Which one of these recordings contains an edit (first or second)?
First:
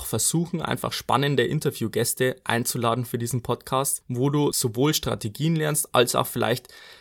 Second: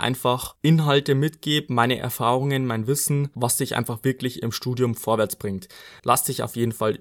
second